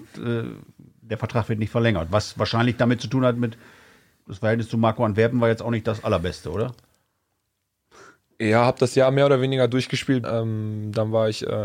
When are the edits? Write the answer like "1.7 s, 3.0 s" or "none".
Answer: 10.2 s